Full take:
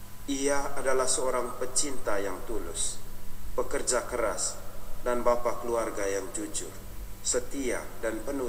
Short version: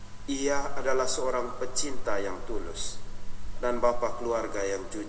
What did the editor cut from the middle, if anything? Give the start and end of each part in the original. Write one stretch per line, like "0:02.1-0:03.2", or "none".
0:03.5-0:05.0